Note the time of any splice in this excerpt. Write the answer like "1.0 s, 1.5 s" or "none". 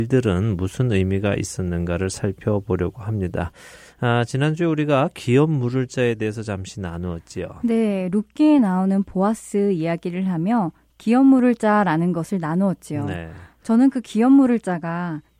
none